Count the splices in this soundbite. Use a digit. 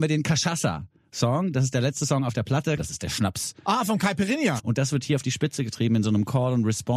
2